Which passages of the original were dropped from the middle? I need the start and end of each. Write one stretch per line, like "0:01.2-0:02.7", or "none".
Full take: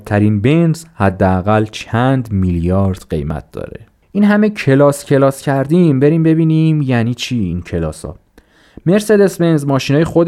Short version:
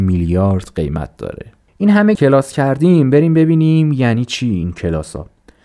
0:04.5-0:05.0